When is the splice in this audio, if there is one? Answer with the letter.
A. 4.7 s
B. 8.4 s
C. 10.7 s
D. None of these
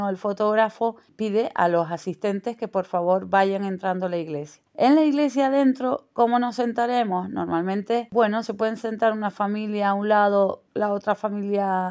D